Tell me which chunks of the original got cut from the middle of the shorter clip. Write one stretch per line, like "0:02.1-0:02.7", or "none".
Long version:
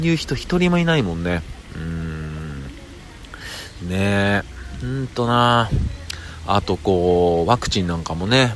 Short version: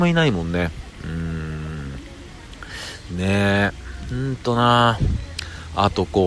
none